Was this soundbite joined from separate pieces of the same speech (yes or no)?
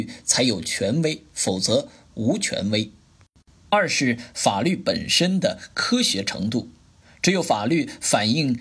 no